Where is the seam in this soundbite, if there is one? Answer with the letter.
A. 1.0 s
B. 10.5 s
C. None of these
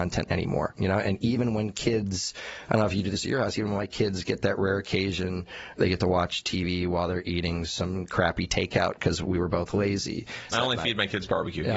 B